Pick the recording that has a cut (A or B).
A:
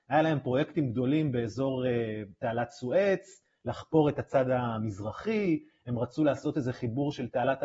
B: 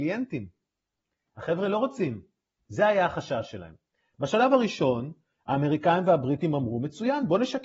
B